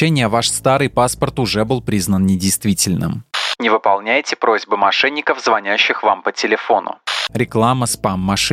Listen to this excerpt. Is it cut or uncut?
cut